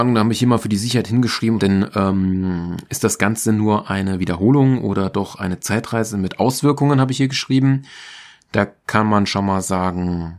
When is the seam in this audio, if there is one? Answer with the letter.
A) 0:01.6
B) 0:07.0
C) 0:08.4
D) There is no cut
A